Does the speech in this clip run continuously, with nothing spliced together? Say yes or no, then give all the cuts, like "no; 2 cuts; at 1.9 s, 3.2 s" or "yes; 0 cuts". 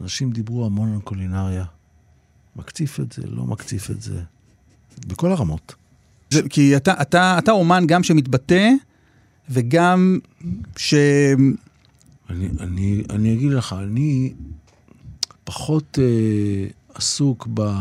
no; 3 cuts; at 6.3 s, 12.2 s, 15.3 s